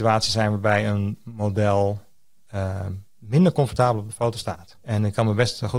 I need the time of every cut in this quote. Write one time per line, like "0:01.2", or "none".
0:04.7

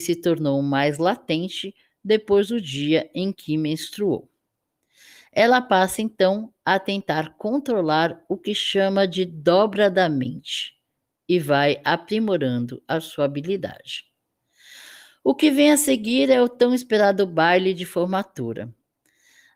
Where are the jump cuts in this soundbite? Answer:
none

